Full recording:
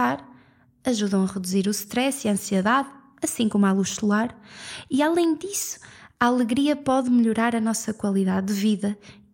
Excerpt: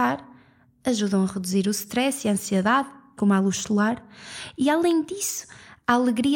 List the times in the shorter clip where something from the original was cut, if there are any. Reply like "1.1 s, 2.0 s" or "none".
3.2 s